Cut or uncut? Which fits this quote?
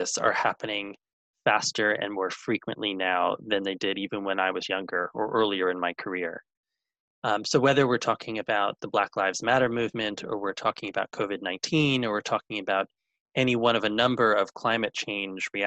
uncut